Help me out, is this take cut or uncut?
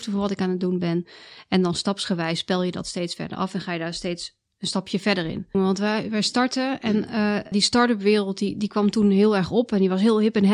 cut